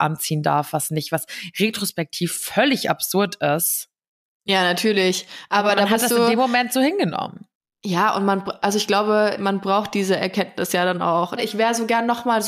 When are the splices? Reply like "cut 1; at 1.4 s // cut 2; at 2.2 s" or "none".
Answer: cut 1; at 9.4 s // cut 2; at 11.4 s